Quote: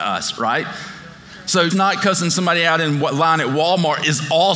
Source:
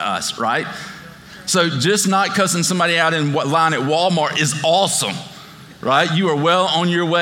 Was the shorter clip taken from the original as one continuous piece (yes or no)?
no